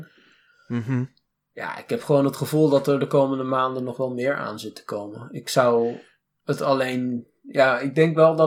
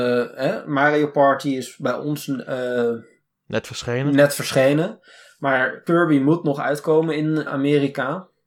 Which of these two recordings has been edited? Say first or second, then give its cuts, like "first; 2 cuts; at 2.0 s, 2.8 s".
second; 1 cut; at 7.5 s